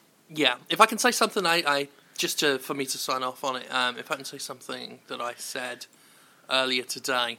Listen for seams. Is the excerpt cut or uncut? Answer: uncut